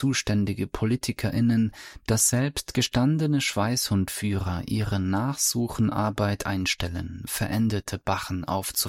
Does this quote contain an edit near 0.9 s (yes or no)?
no